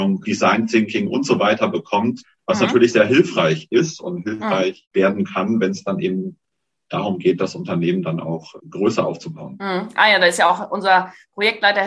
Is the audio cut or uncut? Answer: uncut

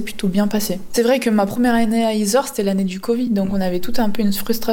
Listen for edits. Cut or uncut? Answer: uncut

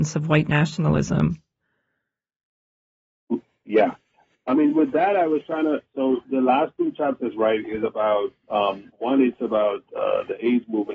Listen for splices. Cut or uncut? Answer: uncut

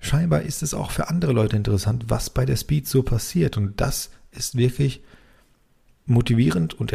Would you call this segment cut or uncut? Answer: uncut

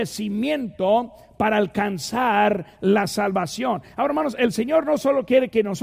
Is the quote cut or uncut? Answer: uncut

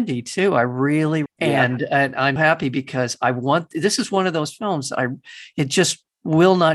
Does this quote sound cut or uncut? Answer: cut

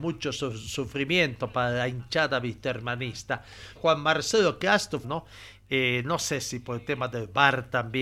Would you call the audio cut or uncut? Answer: cut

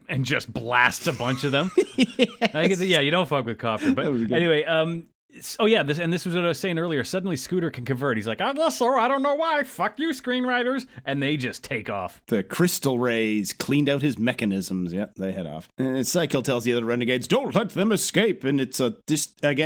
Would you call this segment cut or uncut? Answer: uncut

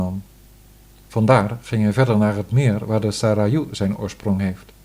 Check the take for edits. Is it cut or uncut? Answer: uncut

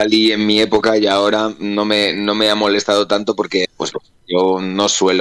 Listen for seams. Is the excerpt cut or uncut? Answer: cut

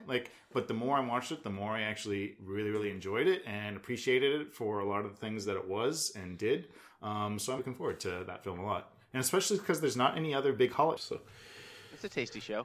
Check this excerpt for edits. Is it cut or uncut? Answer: cut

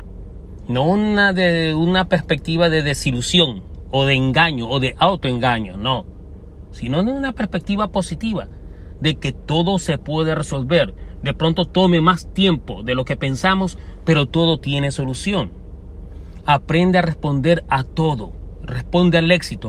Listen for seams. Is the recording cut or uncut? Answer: uncut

